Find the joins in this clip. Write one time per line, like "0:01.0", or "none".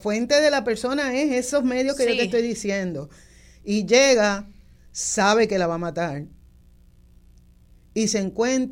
none